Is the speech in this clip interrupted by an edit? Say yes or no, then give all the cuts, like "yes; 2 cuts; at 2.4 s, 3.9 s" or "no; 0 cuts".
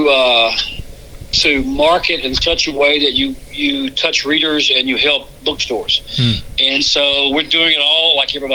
no; 0 cuts